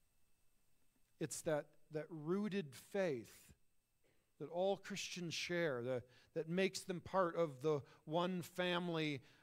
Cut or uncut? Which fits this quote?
cut